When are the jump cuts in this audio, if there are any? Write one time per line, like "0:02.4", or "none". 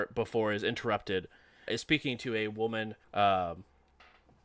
0:01.7
0:03.0